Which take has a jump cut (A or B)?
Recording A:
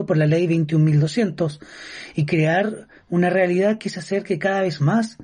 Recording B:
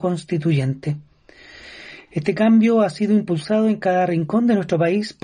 B